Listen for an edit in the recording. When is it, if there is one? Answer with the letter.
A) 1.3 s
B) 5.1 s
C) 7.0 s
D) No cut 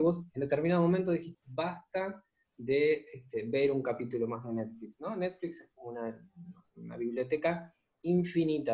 A